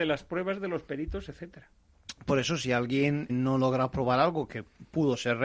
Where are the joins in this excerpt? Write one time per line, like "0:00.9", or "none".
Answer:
0:03.3